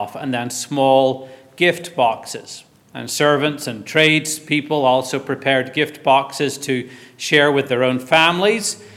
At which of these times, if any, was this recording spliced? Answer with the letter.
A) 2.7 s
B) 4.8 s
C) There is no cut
C